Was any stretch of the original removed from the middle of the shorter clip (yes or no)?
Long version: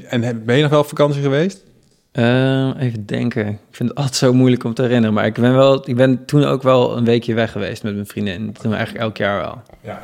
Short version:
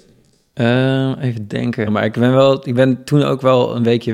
yes